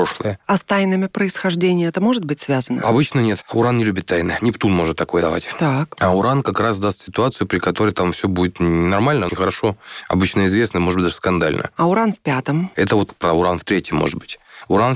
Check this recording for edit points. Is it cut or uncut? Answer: cut